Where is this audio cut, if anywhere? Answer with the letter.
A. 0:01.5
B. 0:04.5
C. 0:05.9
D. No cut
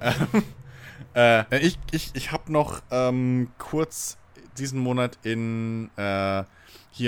A